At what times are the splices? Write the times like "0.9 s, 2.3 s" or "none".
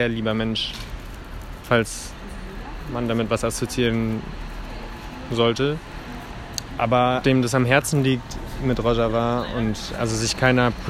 1.6 s, 7.2 s